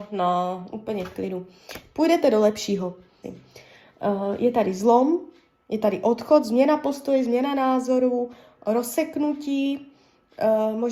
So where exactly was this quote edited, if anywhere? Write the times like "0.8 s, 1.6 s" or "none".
3.2 s